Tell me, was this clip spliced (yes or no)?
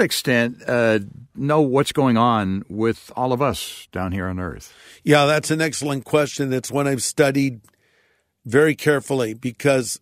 yes